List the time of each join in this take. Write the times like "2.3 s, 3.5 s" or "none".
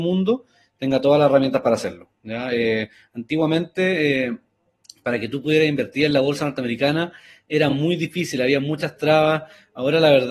none